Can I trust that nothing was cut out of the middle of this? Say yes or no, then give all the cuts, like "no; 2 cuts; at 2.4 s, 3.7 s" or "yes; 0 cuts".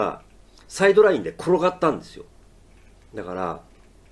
no; 1 cut; at 3.0 s